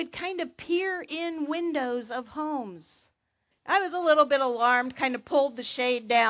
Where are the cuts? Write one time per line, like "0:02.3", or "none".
0:03.5